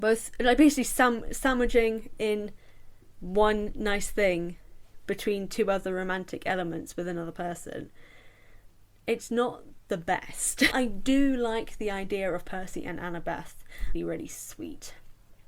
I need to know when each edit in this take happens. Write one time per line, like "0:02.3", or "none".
0:10.7
0:13.9